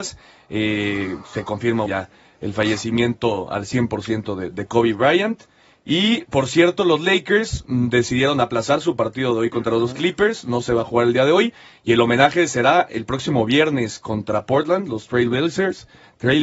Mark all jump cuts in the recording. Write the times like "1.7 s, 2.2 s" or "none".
1.9 s